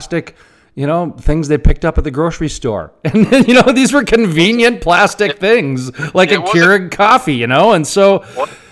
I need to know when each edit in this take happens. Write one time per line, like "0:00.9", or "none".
none